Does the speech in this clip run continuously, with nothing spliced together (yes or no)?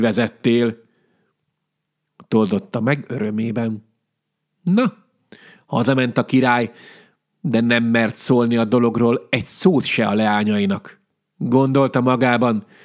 yes